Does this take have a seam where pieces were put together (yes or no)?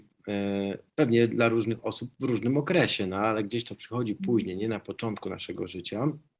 no